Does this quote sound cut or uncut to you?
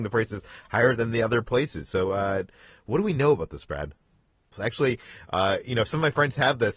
cut